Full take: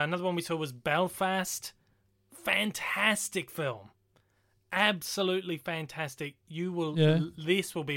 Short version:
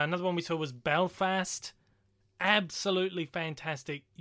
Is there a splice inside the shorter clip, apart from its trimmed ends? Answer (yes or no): yes